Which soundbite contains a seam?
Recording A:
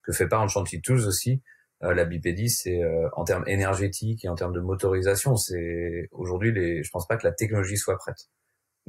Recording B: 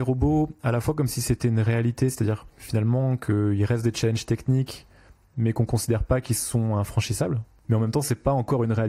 B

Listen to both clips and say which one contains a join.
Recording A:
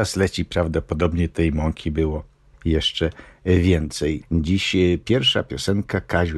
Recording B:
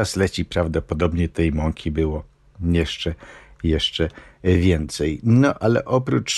A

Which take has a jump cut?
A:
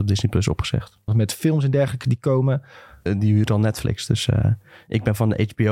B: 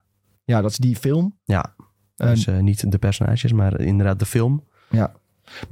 A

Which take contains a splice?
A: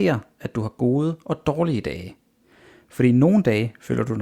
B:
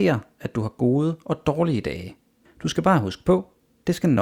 B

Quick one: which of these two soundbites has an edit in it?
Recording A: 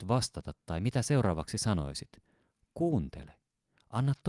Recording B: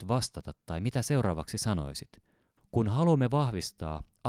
B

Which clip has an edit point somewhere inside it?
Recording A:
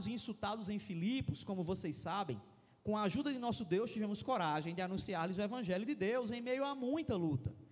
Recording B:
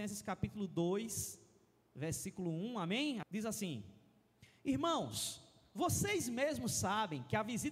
B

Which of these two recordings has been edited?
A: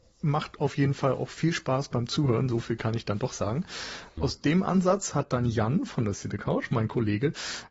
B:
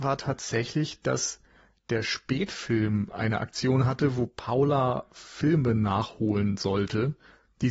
A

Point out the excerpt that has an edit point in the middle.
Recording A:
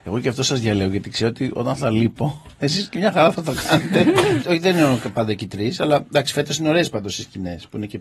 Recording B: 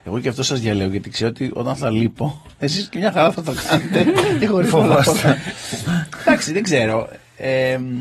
A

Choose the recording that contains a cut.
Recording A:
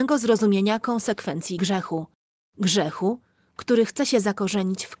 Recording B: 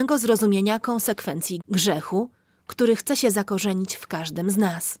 B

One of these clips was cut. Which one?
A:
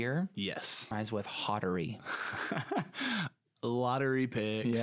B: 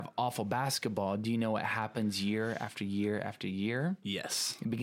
A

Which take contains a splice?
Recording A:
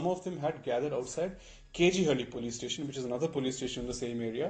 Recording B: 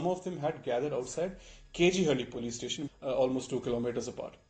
B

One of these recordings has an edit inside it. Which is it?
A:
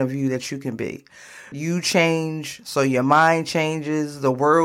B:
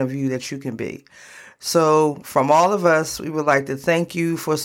A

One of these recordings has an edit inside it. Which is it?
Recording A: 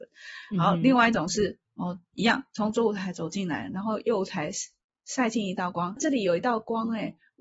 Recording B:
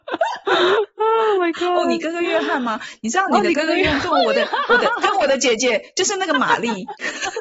A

